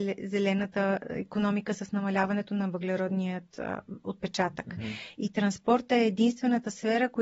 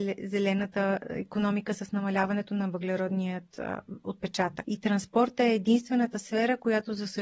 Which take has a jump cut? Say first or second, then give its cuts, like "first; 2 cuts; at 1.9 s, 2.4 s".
second; 1 cut; at 4.6 s